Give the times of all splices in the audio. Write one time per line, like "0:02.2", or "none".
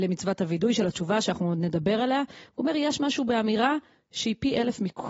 none

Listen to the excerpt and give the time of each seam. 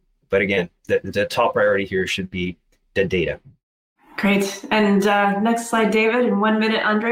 none

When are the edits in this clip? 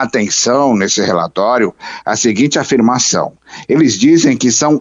0:02.0

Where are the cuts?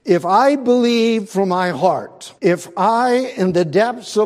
0:02.4

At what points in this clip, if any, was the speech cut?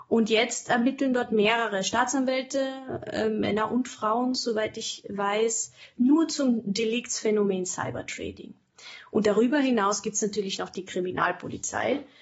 none

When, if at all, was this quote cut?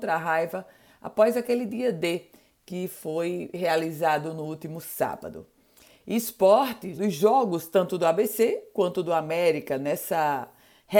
0:07.0

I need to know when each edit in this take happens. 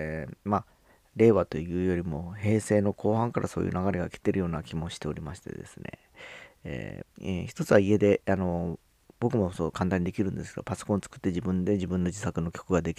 0:07.0

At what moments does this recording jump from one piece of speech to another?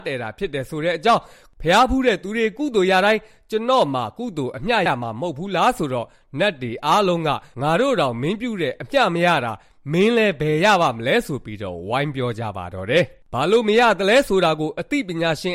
0:04.9

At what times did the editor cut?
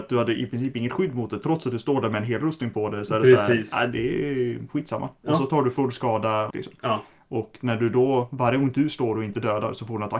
0:06.5

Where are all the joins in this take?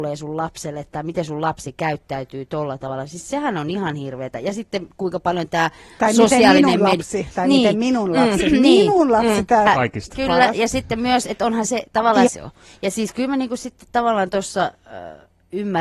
0:09.7
0:12.3

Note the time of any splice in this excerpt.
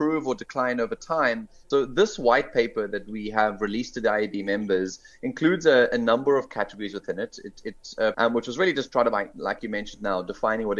0:01.7
0:08.1

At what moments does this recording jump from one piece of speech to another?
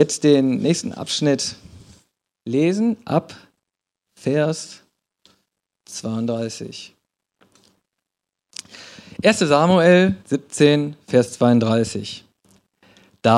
0:10.2

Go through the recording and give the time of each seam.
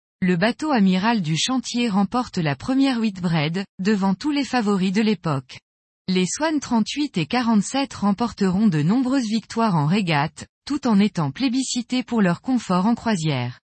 0:03.7
0:06.0

